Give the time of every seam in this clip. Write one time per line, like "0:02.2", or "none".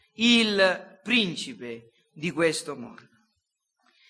none

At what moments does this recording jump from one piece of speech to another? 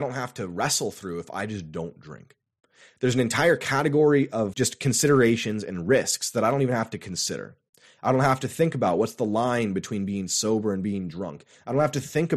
0:04.5

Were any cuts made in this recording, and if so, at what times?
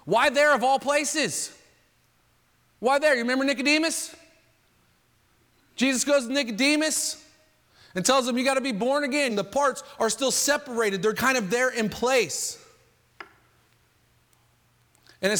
0:09.3
0:11.1

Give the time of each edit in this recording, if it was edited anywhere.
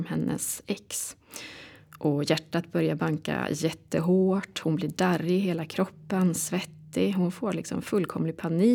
none

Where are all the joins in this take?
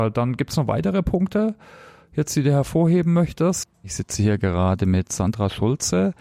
0:03.6

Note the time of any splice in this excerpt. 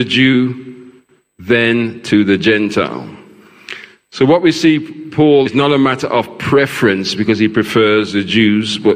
0:05.5

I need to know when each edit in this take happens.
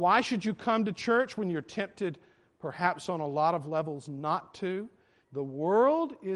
0:05.2

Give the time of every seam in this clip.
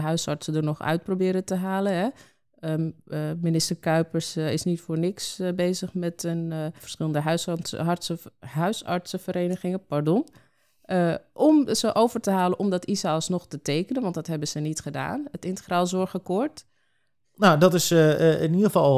0:06.8
0:17.2

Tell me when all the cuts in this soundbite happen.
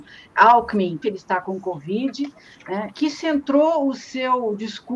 0:01.0
0:02.9

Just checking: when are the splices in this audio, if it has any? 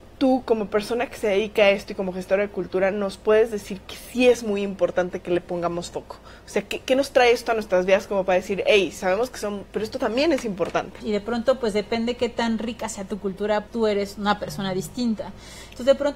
0:09.7
0:11.0
0:13.7

